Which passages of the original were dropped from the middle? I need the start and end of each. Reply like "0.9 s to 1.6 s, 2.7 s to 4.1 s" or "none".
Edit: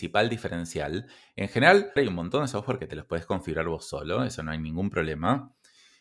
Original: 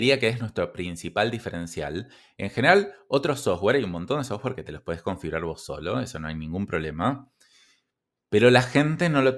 3.0 s to 3.7 s